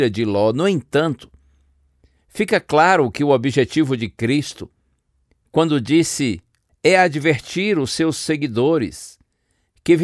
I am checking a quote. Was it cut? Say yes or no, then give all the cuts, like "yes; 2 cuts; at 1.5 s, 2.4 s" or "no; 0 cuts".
yes; 1 cut; at 6.7 s